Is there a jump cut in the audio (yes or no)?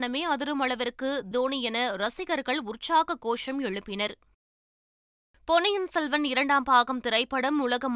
yes